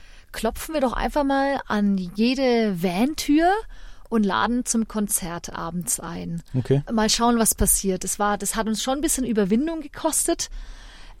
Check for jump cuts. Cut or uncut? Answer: uncut